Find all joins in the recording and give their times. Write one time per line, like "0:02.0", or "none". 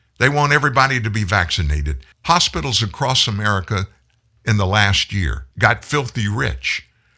0:02.1
0:05.5

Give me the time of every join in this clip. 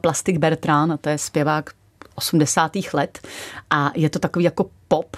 none

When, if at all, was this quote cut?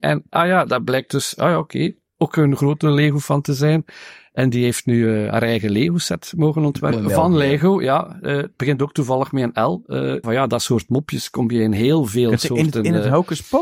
0:06.9
0:10.2

